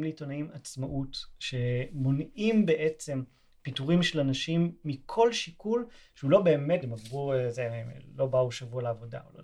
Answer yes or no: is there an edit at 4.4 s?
no